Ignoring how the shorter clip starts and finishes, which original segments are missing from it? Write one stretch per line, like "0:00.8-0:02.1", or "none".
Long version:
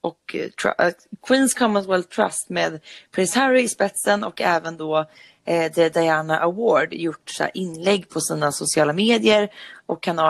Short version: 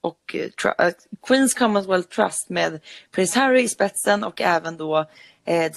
none